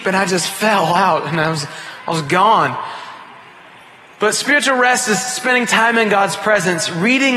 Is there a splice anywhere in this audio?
no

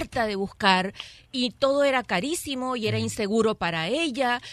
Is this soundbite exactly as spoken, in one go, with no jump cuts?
yes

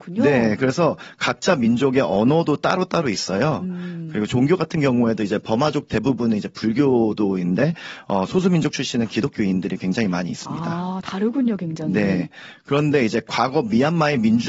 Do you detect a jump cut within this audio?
no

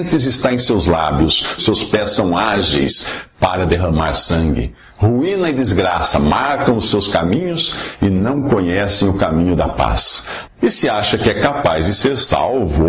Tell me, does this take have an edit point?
yes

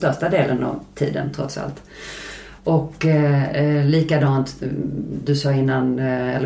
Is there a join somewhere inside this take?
yes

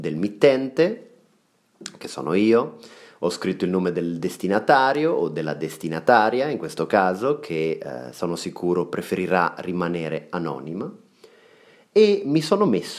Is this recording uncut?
yes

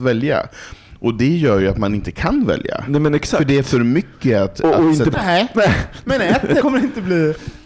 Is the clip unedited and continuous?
no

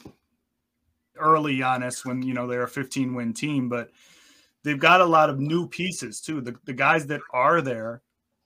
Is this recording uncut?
no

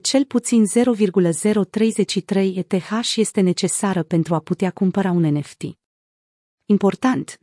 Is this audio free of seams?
yes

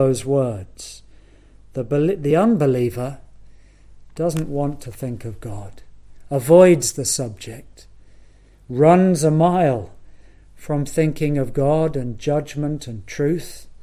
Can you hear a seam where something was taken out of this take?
no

